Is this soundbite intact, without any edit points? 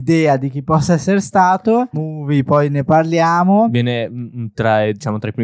no; 1 cut; at 1.9 s

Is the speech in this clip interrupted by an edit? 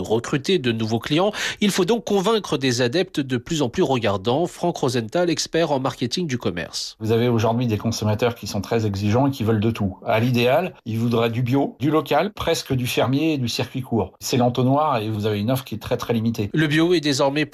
no; 0 cuts

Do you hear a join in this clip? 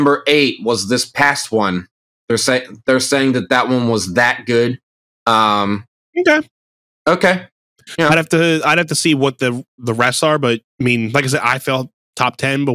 no; 0 cuts

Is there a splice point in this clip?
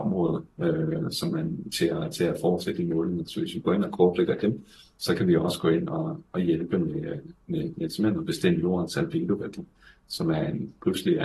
no; 0 cuts

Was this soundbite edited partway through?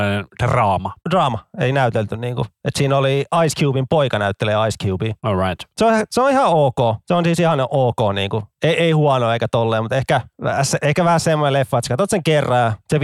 no; 0 cuts

